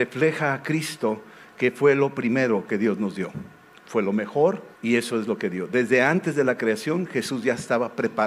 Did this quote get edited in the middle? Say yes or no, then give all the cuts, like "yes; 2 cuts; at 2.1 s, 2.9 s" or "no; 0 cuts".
yes; 1 cut; at 4.7 s